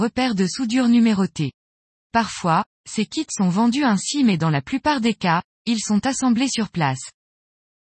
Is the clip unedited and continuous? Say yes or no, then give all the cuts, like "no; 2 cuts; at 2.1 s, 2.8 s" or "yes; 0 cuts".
yes; 0 cuts